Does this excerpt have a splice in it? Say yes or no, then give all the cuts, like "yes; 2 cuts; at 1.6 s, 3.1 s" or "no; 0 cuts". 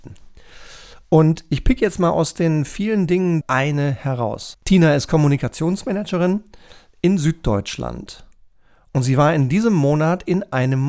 yes; 2 cuts; at 3.4 s, 4.5 s